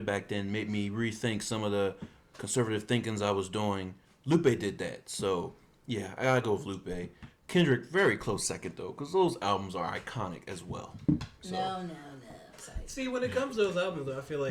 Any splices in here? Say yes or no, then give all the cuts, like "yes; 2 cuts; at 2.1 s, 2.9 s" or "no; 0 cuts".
no; 0 cuts